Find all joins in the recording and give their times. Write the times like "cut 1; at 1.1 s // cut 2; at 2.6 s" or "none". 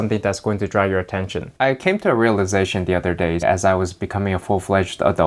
cut 1; at 1.5 s // cut 2; at 3.4 s